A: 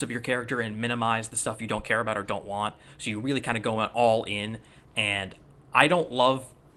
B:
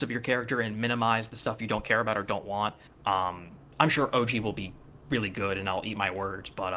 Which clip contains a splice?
B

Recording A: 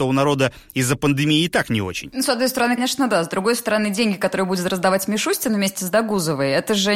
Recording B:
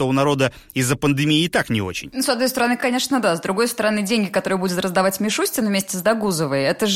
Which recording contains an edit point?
A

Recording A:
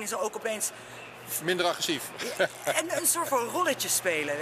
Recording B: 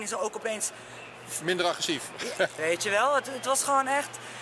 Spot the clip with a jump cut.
B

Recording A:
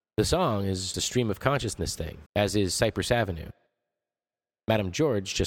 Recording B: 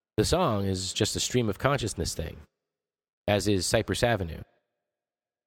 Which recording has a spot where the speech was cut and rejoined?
A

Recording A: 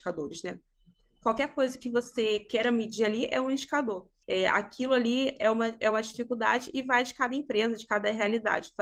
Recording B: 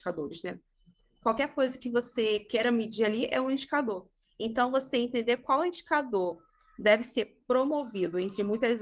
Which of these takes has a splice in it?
A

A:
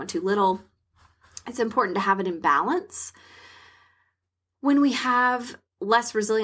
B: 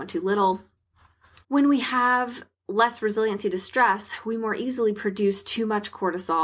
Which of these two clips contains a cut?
B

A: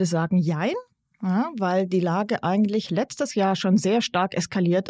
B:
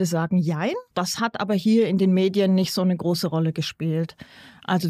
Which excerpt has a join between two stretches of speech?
B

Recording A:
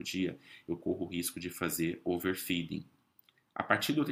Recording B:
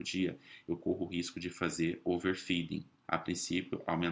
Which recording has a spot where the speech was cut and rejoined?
B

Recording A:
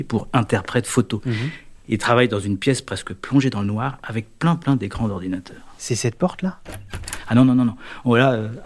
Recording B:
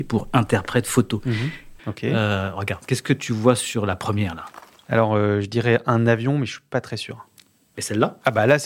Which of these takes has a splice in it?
B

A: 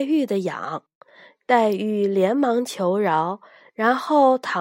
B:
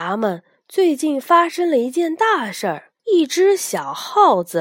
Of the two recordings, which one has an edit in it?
B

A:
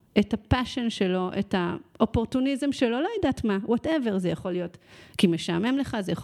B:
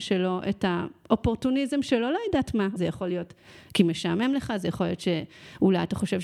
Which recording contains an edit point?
B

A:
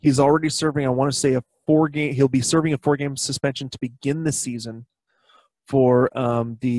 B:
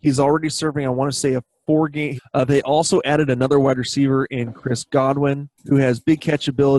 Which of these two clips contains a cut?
B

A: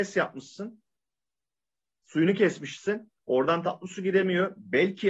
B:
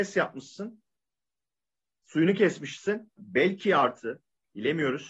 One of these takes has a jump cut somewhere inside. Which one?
B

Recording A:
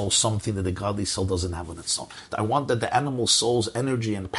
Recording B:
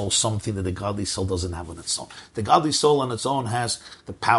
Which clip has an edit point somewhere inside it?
A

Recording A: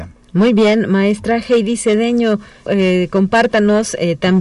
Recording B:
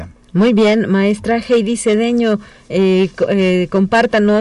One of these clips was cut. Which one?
A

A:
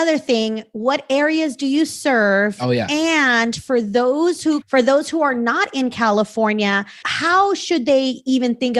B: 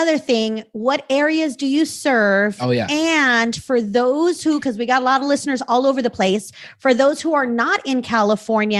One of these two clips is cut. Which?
A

